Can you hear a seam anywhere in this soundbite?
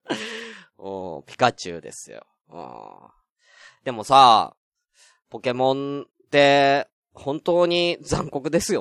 no; 0 cuts

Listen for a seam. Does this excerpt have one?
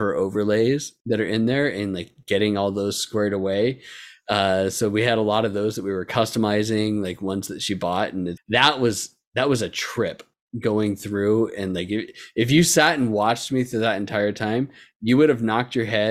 yes; 1 cut; at 8.4 s

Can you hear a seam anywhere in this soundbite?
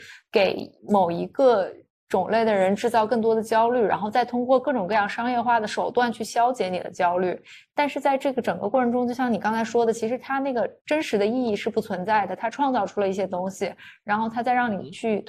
no; 0 cuts

